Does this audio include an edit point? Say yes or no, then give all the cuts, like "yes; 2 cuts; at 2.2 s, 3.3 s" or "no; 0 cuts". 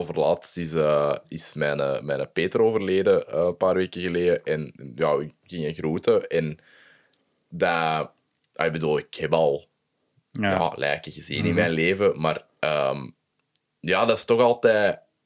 no; 0 cuts